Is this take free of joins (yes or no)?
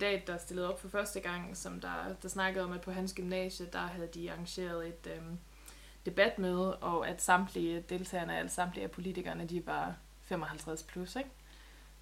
yes